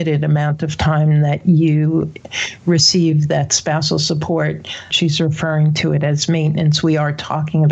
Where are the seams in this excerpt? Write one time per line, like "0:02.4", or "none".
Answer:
0:04.9